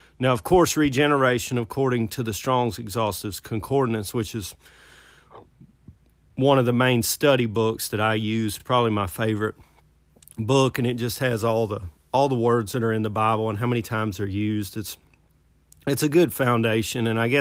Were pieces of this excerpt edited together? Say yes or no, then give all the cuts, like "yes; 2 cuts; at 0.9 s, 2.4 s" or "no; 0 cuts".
no; 0 cuts